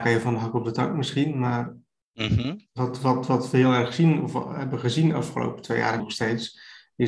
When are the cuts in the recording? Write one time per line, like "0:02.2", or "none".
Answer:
0:06.0